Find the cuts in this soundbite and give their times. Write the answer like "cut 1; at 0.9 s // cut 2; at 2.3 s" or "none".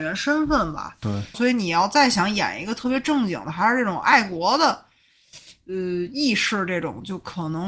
cut 1; at 1.3 s